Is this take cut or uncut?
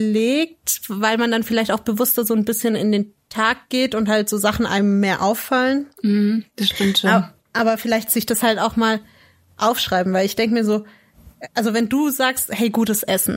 uncut